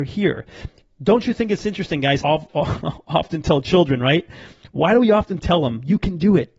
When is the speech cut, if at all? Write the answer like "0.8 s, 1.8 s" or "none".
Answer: 2.2 s